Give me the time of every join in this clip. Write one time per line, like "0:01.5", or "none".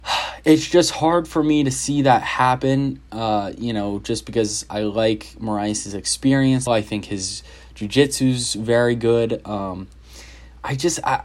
0:06.7